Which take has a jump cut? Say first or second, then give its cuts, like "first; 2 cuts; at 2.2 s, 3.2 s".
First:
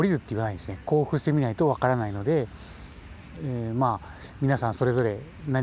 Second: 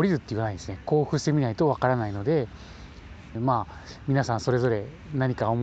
second; 1 cut; at 3.4 s